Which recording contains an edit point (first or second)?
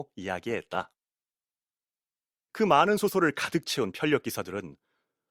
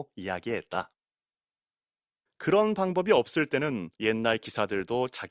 second